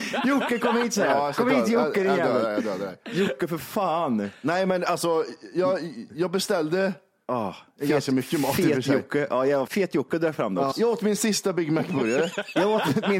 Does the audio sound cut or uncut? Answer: cut